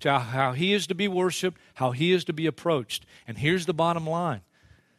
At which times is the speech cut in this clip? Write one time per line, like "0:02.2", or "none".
none